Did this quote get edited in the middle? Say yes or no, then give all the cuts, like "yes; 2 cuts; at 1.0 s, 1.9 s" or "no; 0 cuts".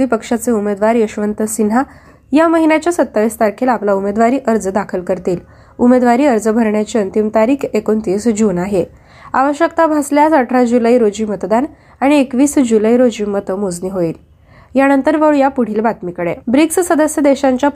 yes; 1 cut; at 16.4 s